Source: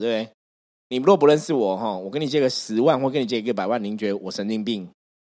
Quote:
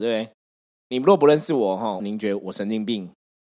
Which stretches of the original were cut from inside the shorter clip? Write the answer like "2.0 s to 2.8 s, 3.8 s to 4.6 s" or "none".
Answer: 2.0 s to 3.8 s